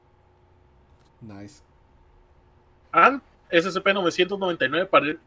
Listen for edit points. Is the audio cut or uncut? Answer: cut